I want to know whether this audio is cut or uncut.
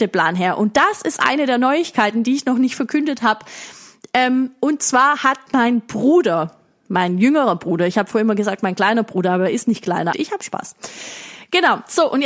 cut